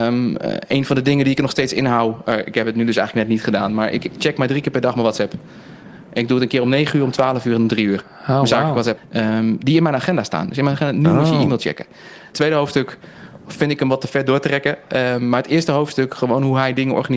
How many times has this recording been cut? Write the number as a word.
two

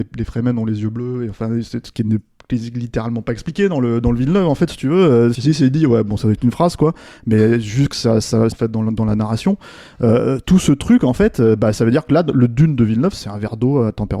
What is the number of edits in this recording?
two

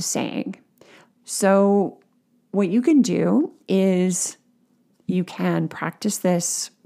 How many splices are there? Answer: one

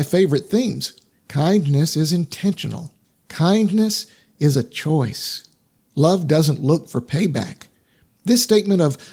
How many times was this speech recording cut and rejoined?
two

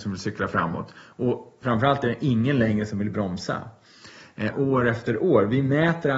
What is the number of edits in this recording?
one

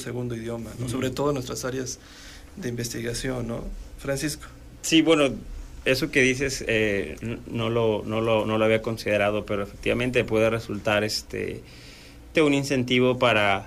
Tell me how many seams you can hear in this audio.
one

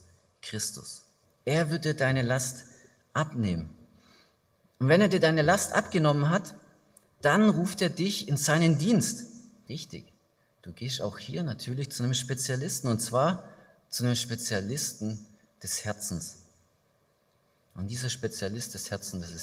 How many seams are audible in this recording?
two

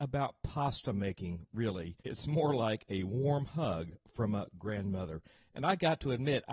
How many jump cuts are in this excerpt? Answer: one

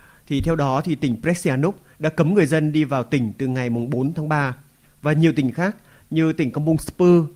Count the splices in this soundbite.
one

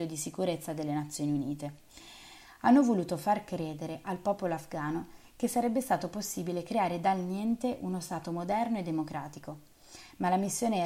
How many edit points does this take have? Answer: zero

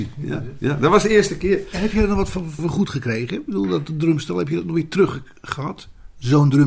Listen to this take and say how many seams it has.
one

